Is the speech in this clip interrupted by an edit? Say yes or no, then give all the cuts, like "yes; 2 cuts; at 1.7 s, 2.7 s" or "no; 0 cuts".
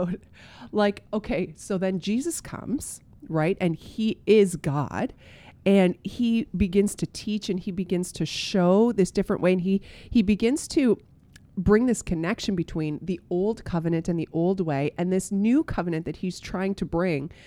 no; 0 cuts